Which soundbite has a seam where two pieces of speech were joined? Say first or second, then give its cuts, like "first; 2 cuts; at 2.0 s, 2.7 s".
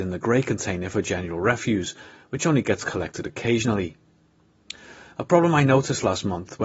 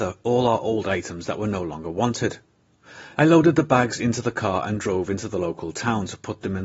second; 1 cut; at 3.1 s